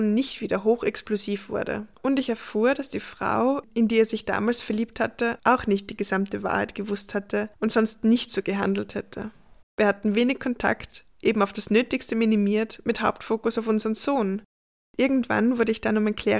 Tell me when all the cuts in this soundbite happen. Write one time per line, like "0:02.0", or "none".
0:01.9
0:09.6